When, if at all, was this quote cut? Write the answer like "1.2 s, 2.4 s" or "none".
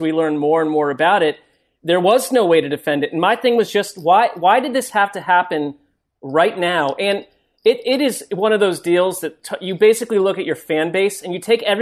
none